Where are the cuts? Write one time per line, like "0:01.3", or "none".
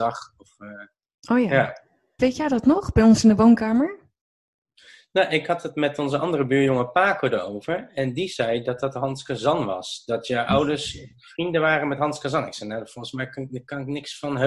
0:02.2